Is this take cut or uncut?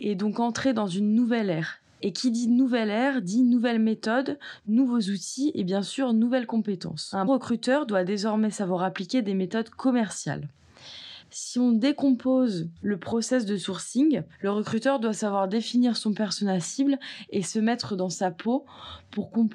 cut